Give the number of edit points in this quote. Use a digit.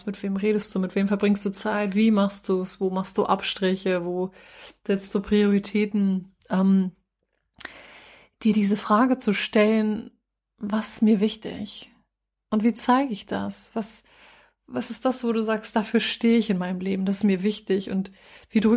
0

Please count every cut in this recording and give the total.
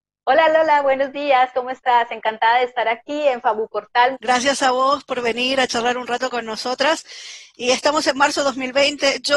1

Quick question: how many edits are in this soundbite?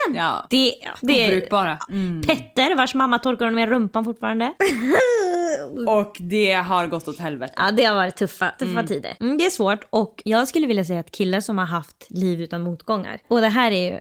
2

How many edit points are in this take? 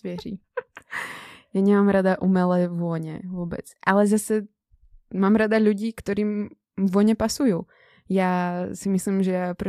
0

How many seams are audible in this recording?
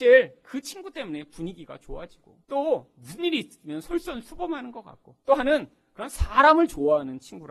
2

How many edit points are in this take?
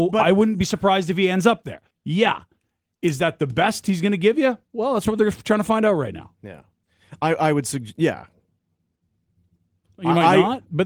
1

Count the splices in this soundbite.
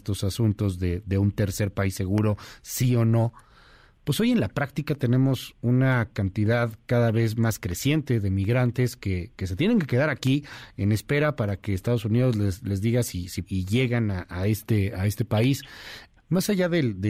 2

